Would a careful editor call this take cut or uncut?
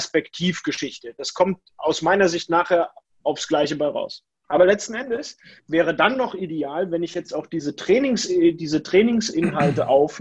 uncut